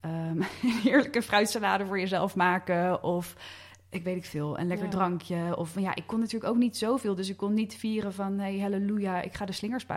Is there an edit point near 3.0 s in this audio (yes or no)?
no